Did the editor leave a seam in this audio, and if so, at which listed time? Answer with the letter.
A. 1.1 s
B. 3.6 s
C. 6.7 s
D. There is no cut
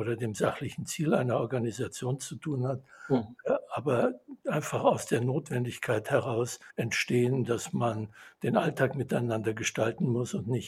C